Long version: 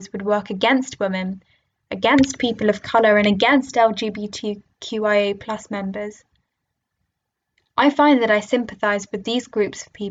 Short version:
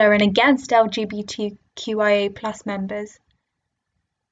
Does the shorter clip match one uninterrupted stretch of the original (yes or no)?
yes